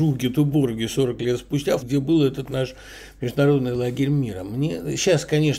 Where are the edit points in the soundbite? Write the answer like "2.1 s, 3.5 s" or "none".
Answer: 1.8 s